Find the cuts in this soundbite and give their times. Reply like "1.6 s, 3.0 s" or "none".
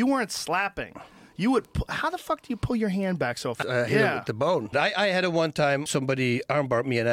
3.6 s, 4.7 s, 5.9 s